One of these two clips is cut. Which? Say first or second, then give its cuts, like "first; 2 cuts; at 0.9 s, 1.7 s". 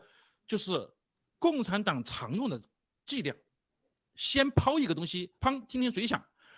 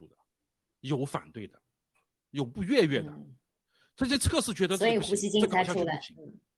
first; 1 cut; at 5.4 s